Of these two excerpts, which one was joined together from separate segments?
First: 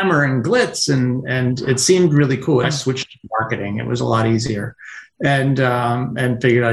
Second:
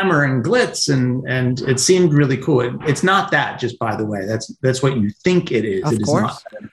first; 1 cut; at 2.6 s

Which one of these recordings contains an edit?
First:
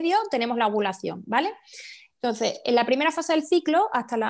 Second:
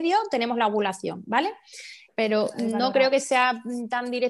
second; 1 cut; at 2.1 s

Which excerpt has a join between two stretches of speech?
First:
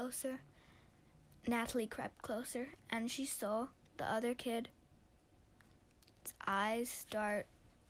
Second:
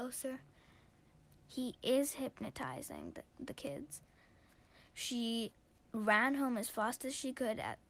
second; 1 cut; at 1.4 s

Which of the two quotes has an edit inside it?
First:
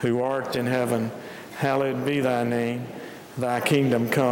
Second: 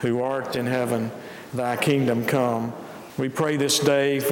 second; 2 cuts; at 1.5 s, 3.1 s

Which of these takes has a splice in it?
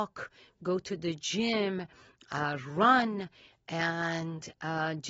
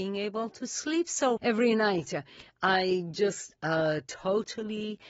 second; 1 cut; at 1.4 s

